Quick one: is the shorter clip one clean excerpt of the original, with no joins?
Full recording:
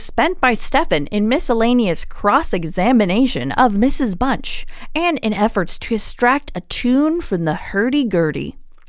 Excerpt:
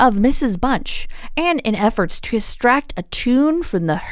yes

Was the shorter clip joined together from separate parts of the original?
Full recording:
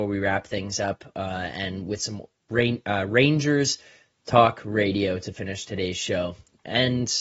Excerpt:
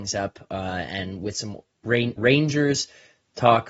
yes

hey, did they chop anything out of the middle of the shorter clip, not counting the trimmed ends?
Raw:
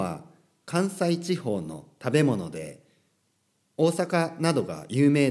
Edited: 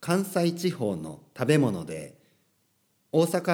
no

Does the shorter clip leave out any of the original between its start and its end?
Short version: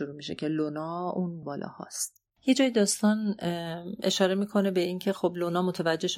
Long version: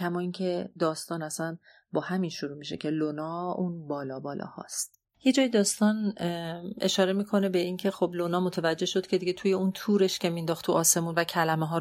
yes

